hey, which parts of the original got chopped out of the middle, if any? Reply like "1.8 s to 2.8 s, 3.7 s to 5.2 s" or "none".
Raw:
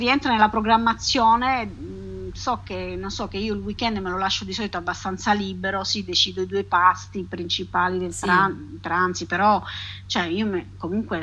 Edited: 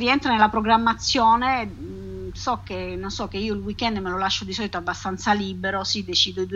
none